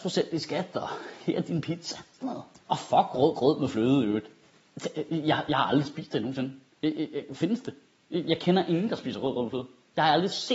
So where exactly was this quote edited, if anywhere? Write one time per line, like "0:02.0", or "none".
none